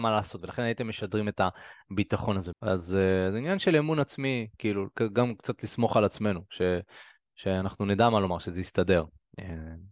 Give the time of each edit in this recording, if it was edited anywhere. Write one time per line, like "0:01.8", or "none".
0:02.5